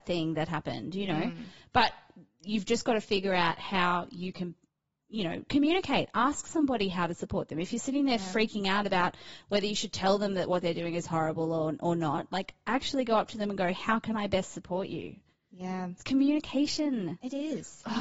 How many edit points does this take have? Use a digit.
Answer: 0